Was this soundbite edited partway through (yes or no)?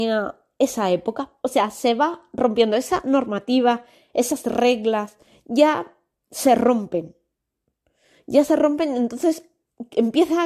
yes